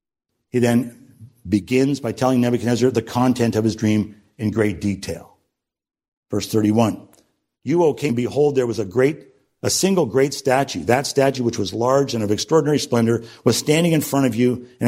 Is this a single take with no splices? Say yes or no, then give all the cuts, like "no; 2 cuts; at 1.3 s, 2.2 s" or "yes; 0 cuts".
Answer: no; 1 cut; at 8.1 s